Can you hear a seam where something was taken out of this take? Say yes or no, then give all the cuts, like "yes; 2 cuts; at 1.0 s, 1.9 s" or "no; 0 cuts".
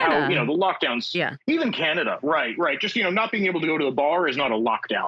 no; 0 cuts